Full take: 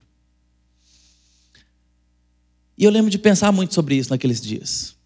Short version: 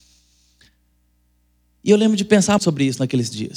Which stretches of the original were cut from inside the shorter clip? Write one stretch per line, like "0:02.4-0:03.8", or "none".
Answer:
0:03.5-0:03.7